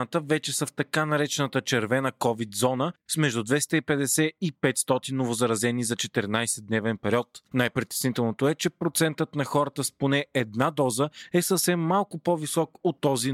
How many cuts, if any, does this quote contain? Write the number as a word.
one